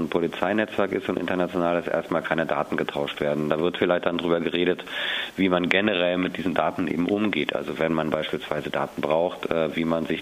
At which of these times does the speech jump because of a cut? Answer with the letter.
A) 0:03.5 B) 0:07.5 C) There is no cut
C